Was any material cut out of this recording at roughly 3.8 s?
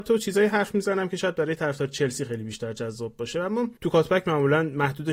yes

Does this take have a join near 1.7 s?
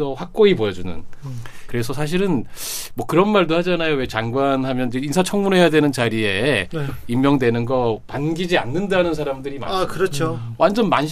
yes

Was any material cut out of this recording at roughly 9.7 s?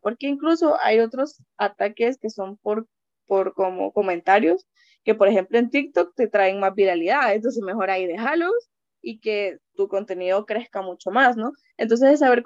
yes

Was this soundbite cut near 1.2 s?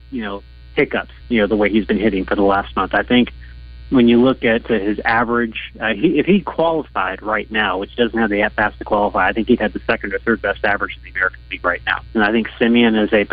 yes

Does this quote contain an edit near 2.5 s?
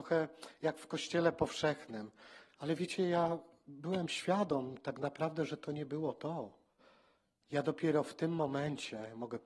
yes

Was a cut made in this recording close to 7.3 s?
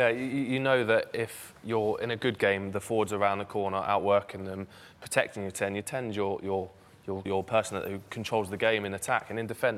yes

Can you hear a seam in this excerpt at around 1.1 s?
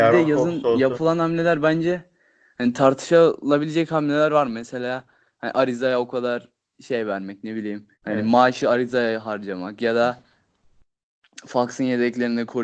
no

